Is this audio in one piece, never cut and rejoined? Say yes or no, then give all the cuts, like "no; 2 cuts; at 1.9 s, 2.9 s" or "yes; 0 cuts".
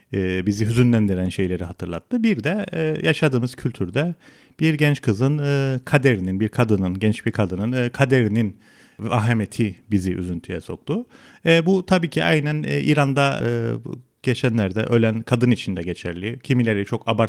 no; 1 cut; at 13.4 s